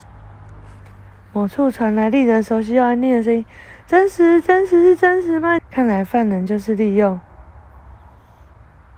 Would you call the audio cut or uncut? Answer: cut